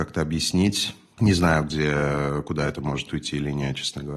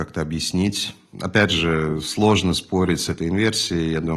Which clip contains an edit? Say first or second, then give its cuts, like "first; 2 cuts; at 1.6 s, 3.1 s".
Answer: second; 1 cut; at 1.1 s